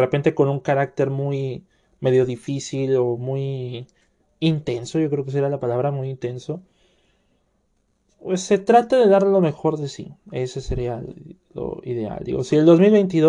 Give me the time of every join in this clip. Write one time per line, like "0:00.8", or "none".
none